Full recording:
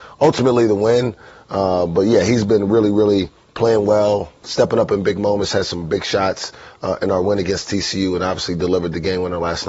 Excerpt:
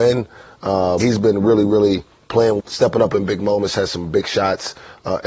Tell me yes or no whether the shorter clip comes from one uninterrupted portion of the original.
no